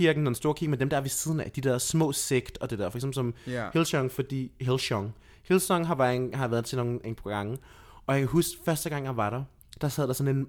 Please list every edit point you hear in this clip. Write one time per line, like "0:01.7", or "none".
none